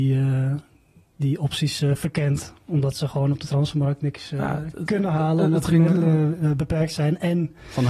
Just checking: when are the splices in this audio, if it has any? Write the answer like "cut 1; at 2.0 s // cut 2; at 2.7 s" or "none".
none